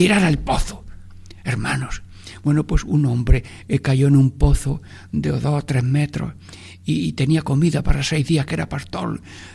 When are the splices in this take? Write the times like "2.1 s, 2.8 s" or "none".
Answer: none